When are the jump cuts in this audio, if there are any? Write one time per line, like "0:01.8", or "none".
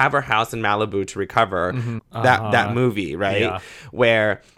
0:02.0